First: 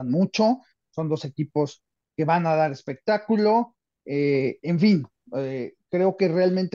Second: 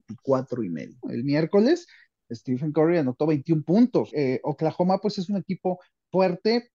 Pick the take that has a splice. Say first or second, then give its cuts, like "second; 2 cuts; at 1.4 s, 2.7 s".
second; 2 cuts; at 1.0 s, 4.1 s